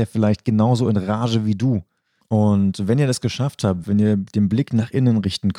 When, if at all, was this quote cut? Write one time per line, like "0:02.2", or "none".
0:02.2
0:03.8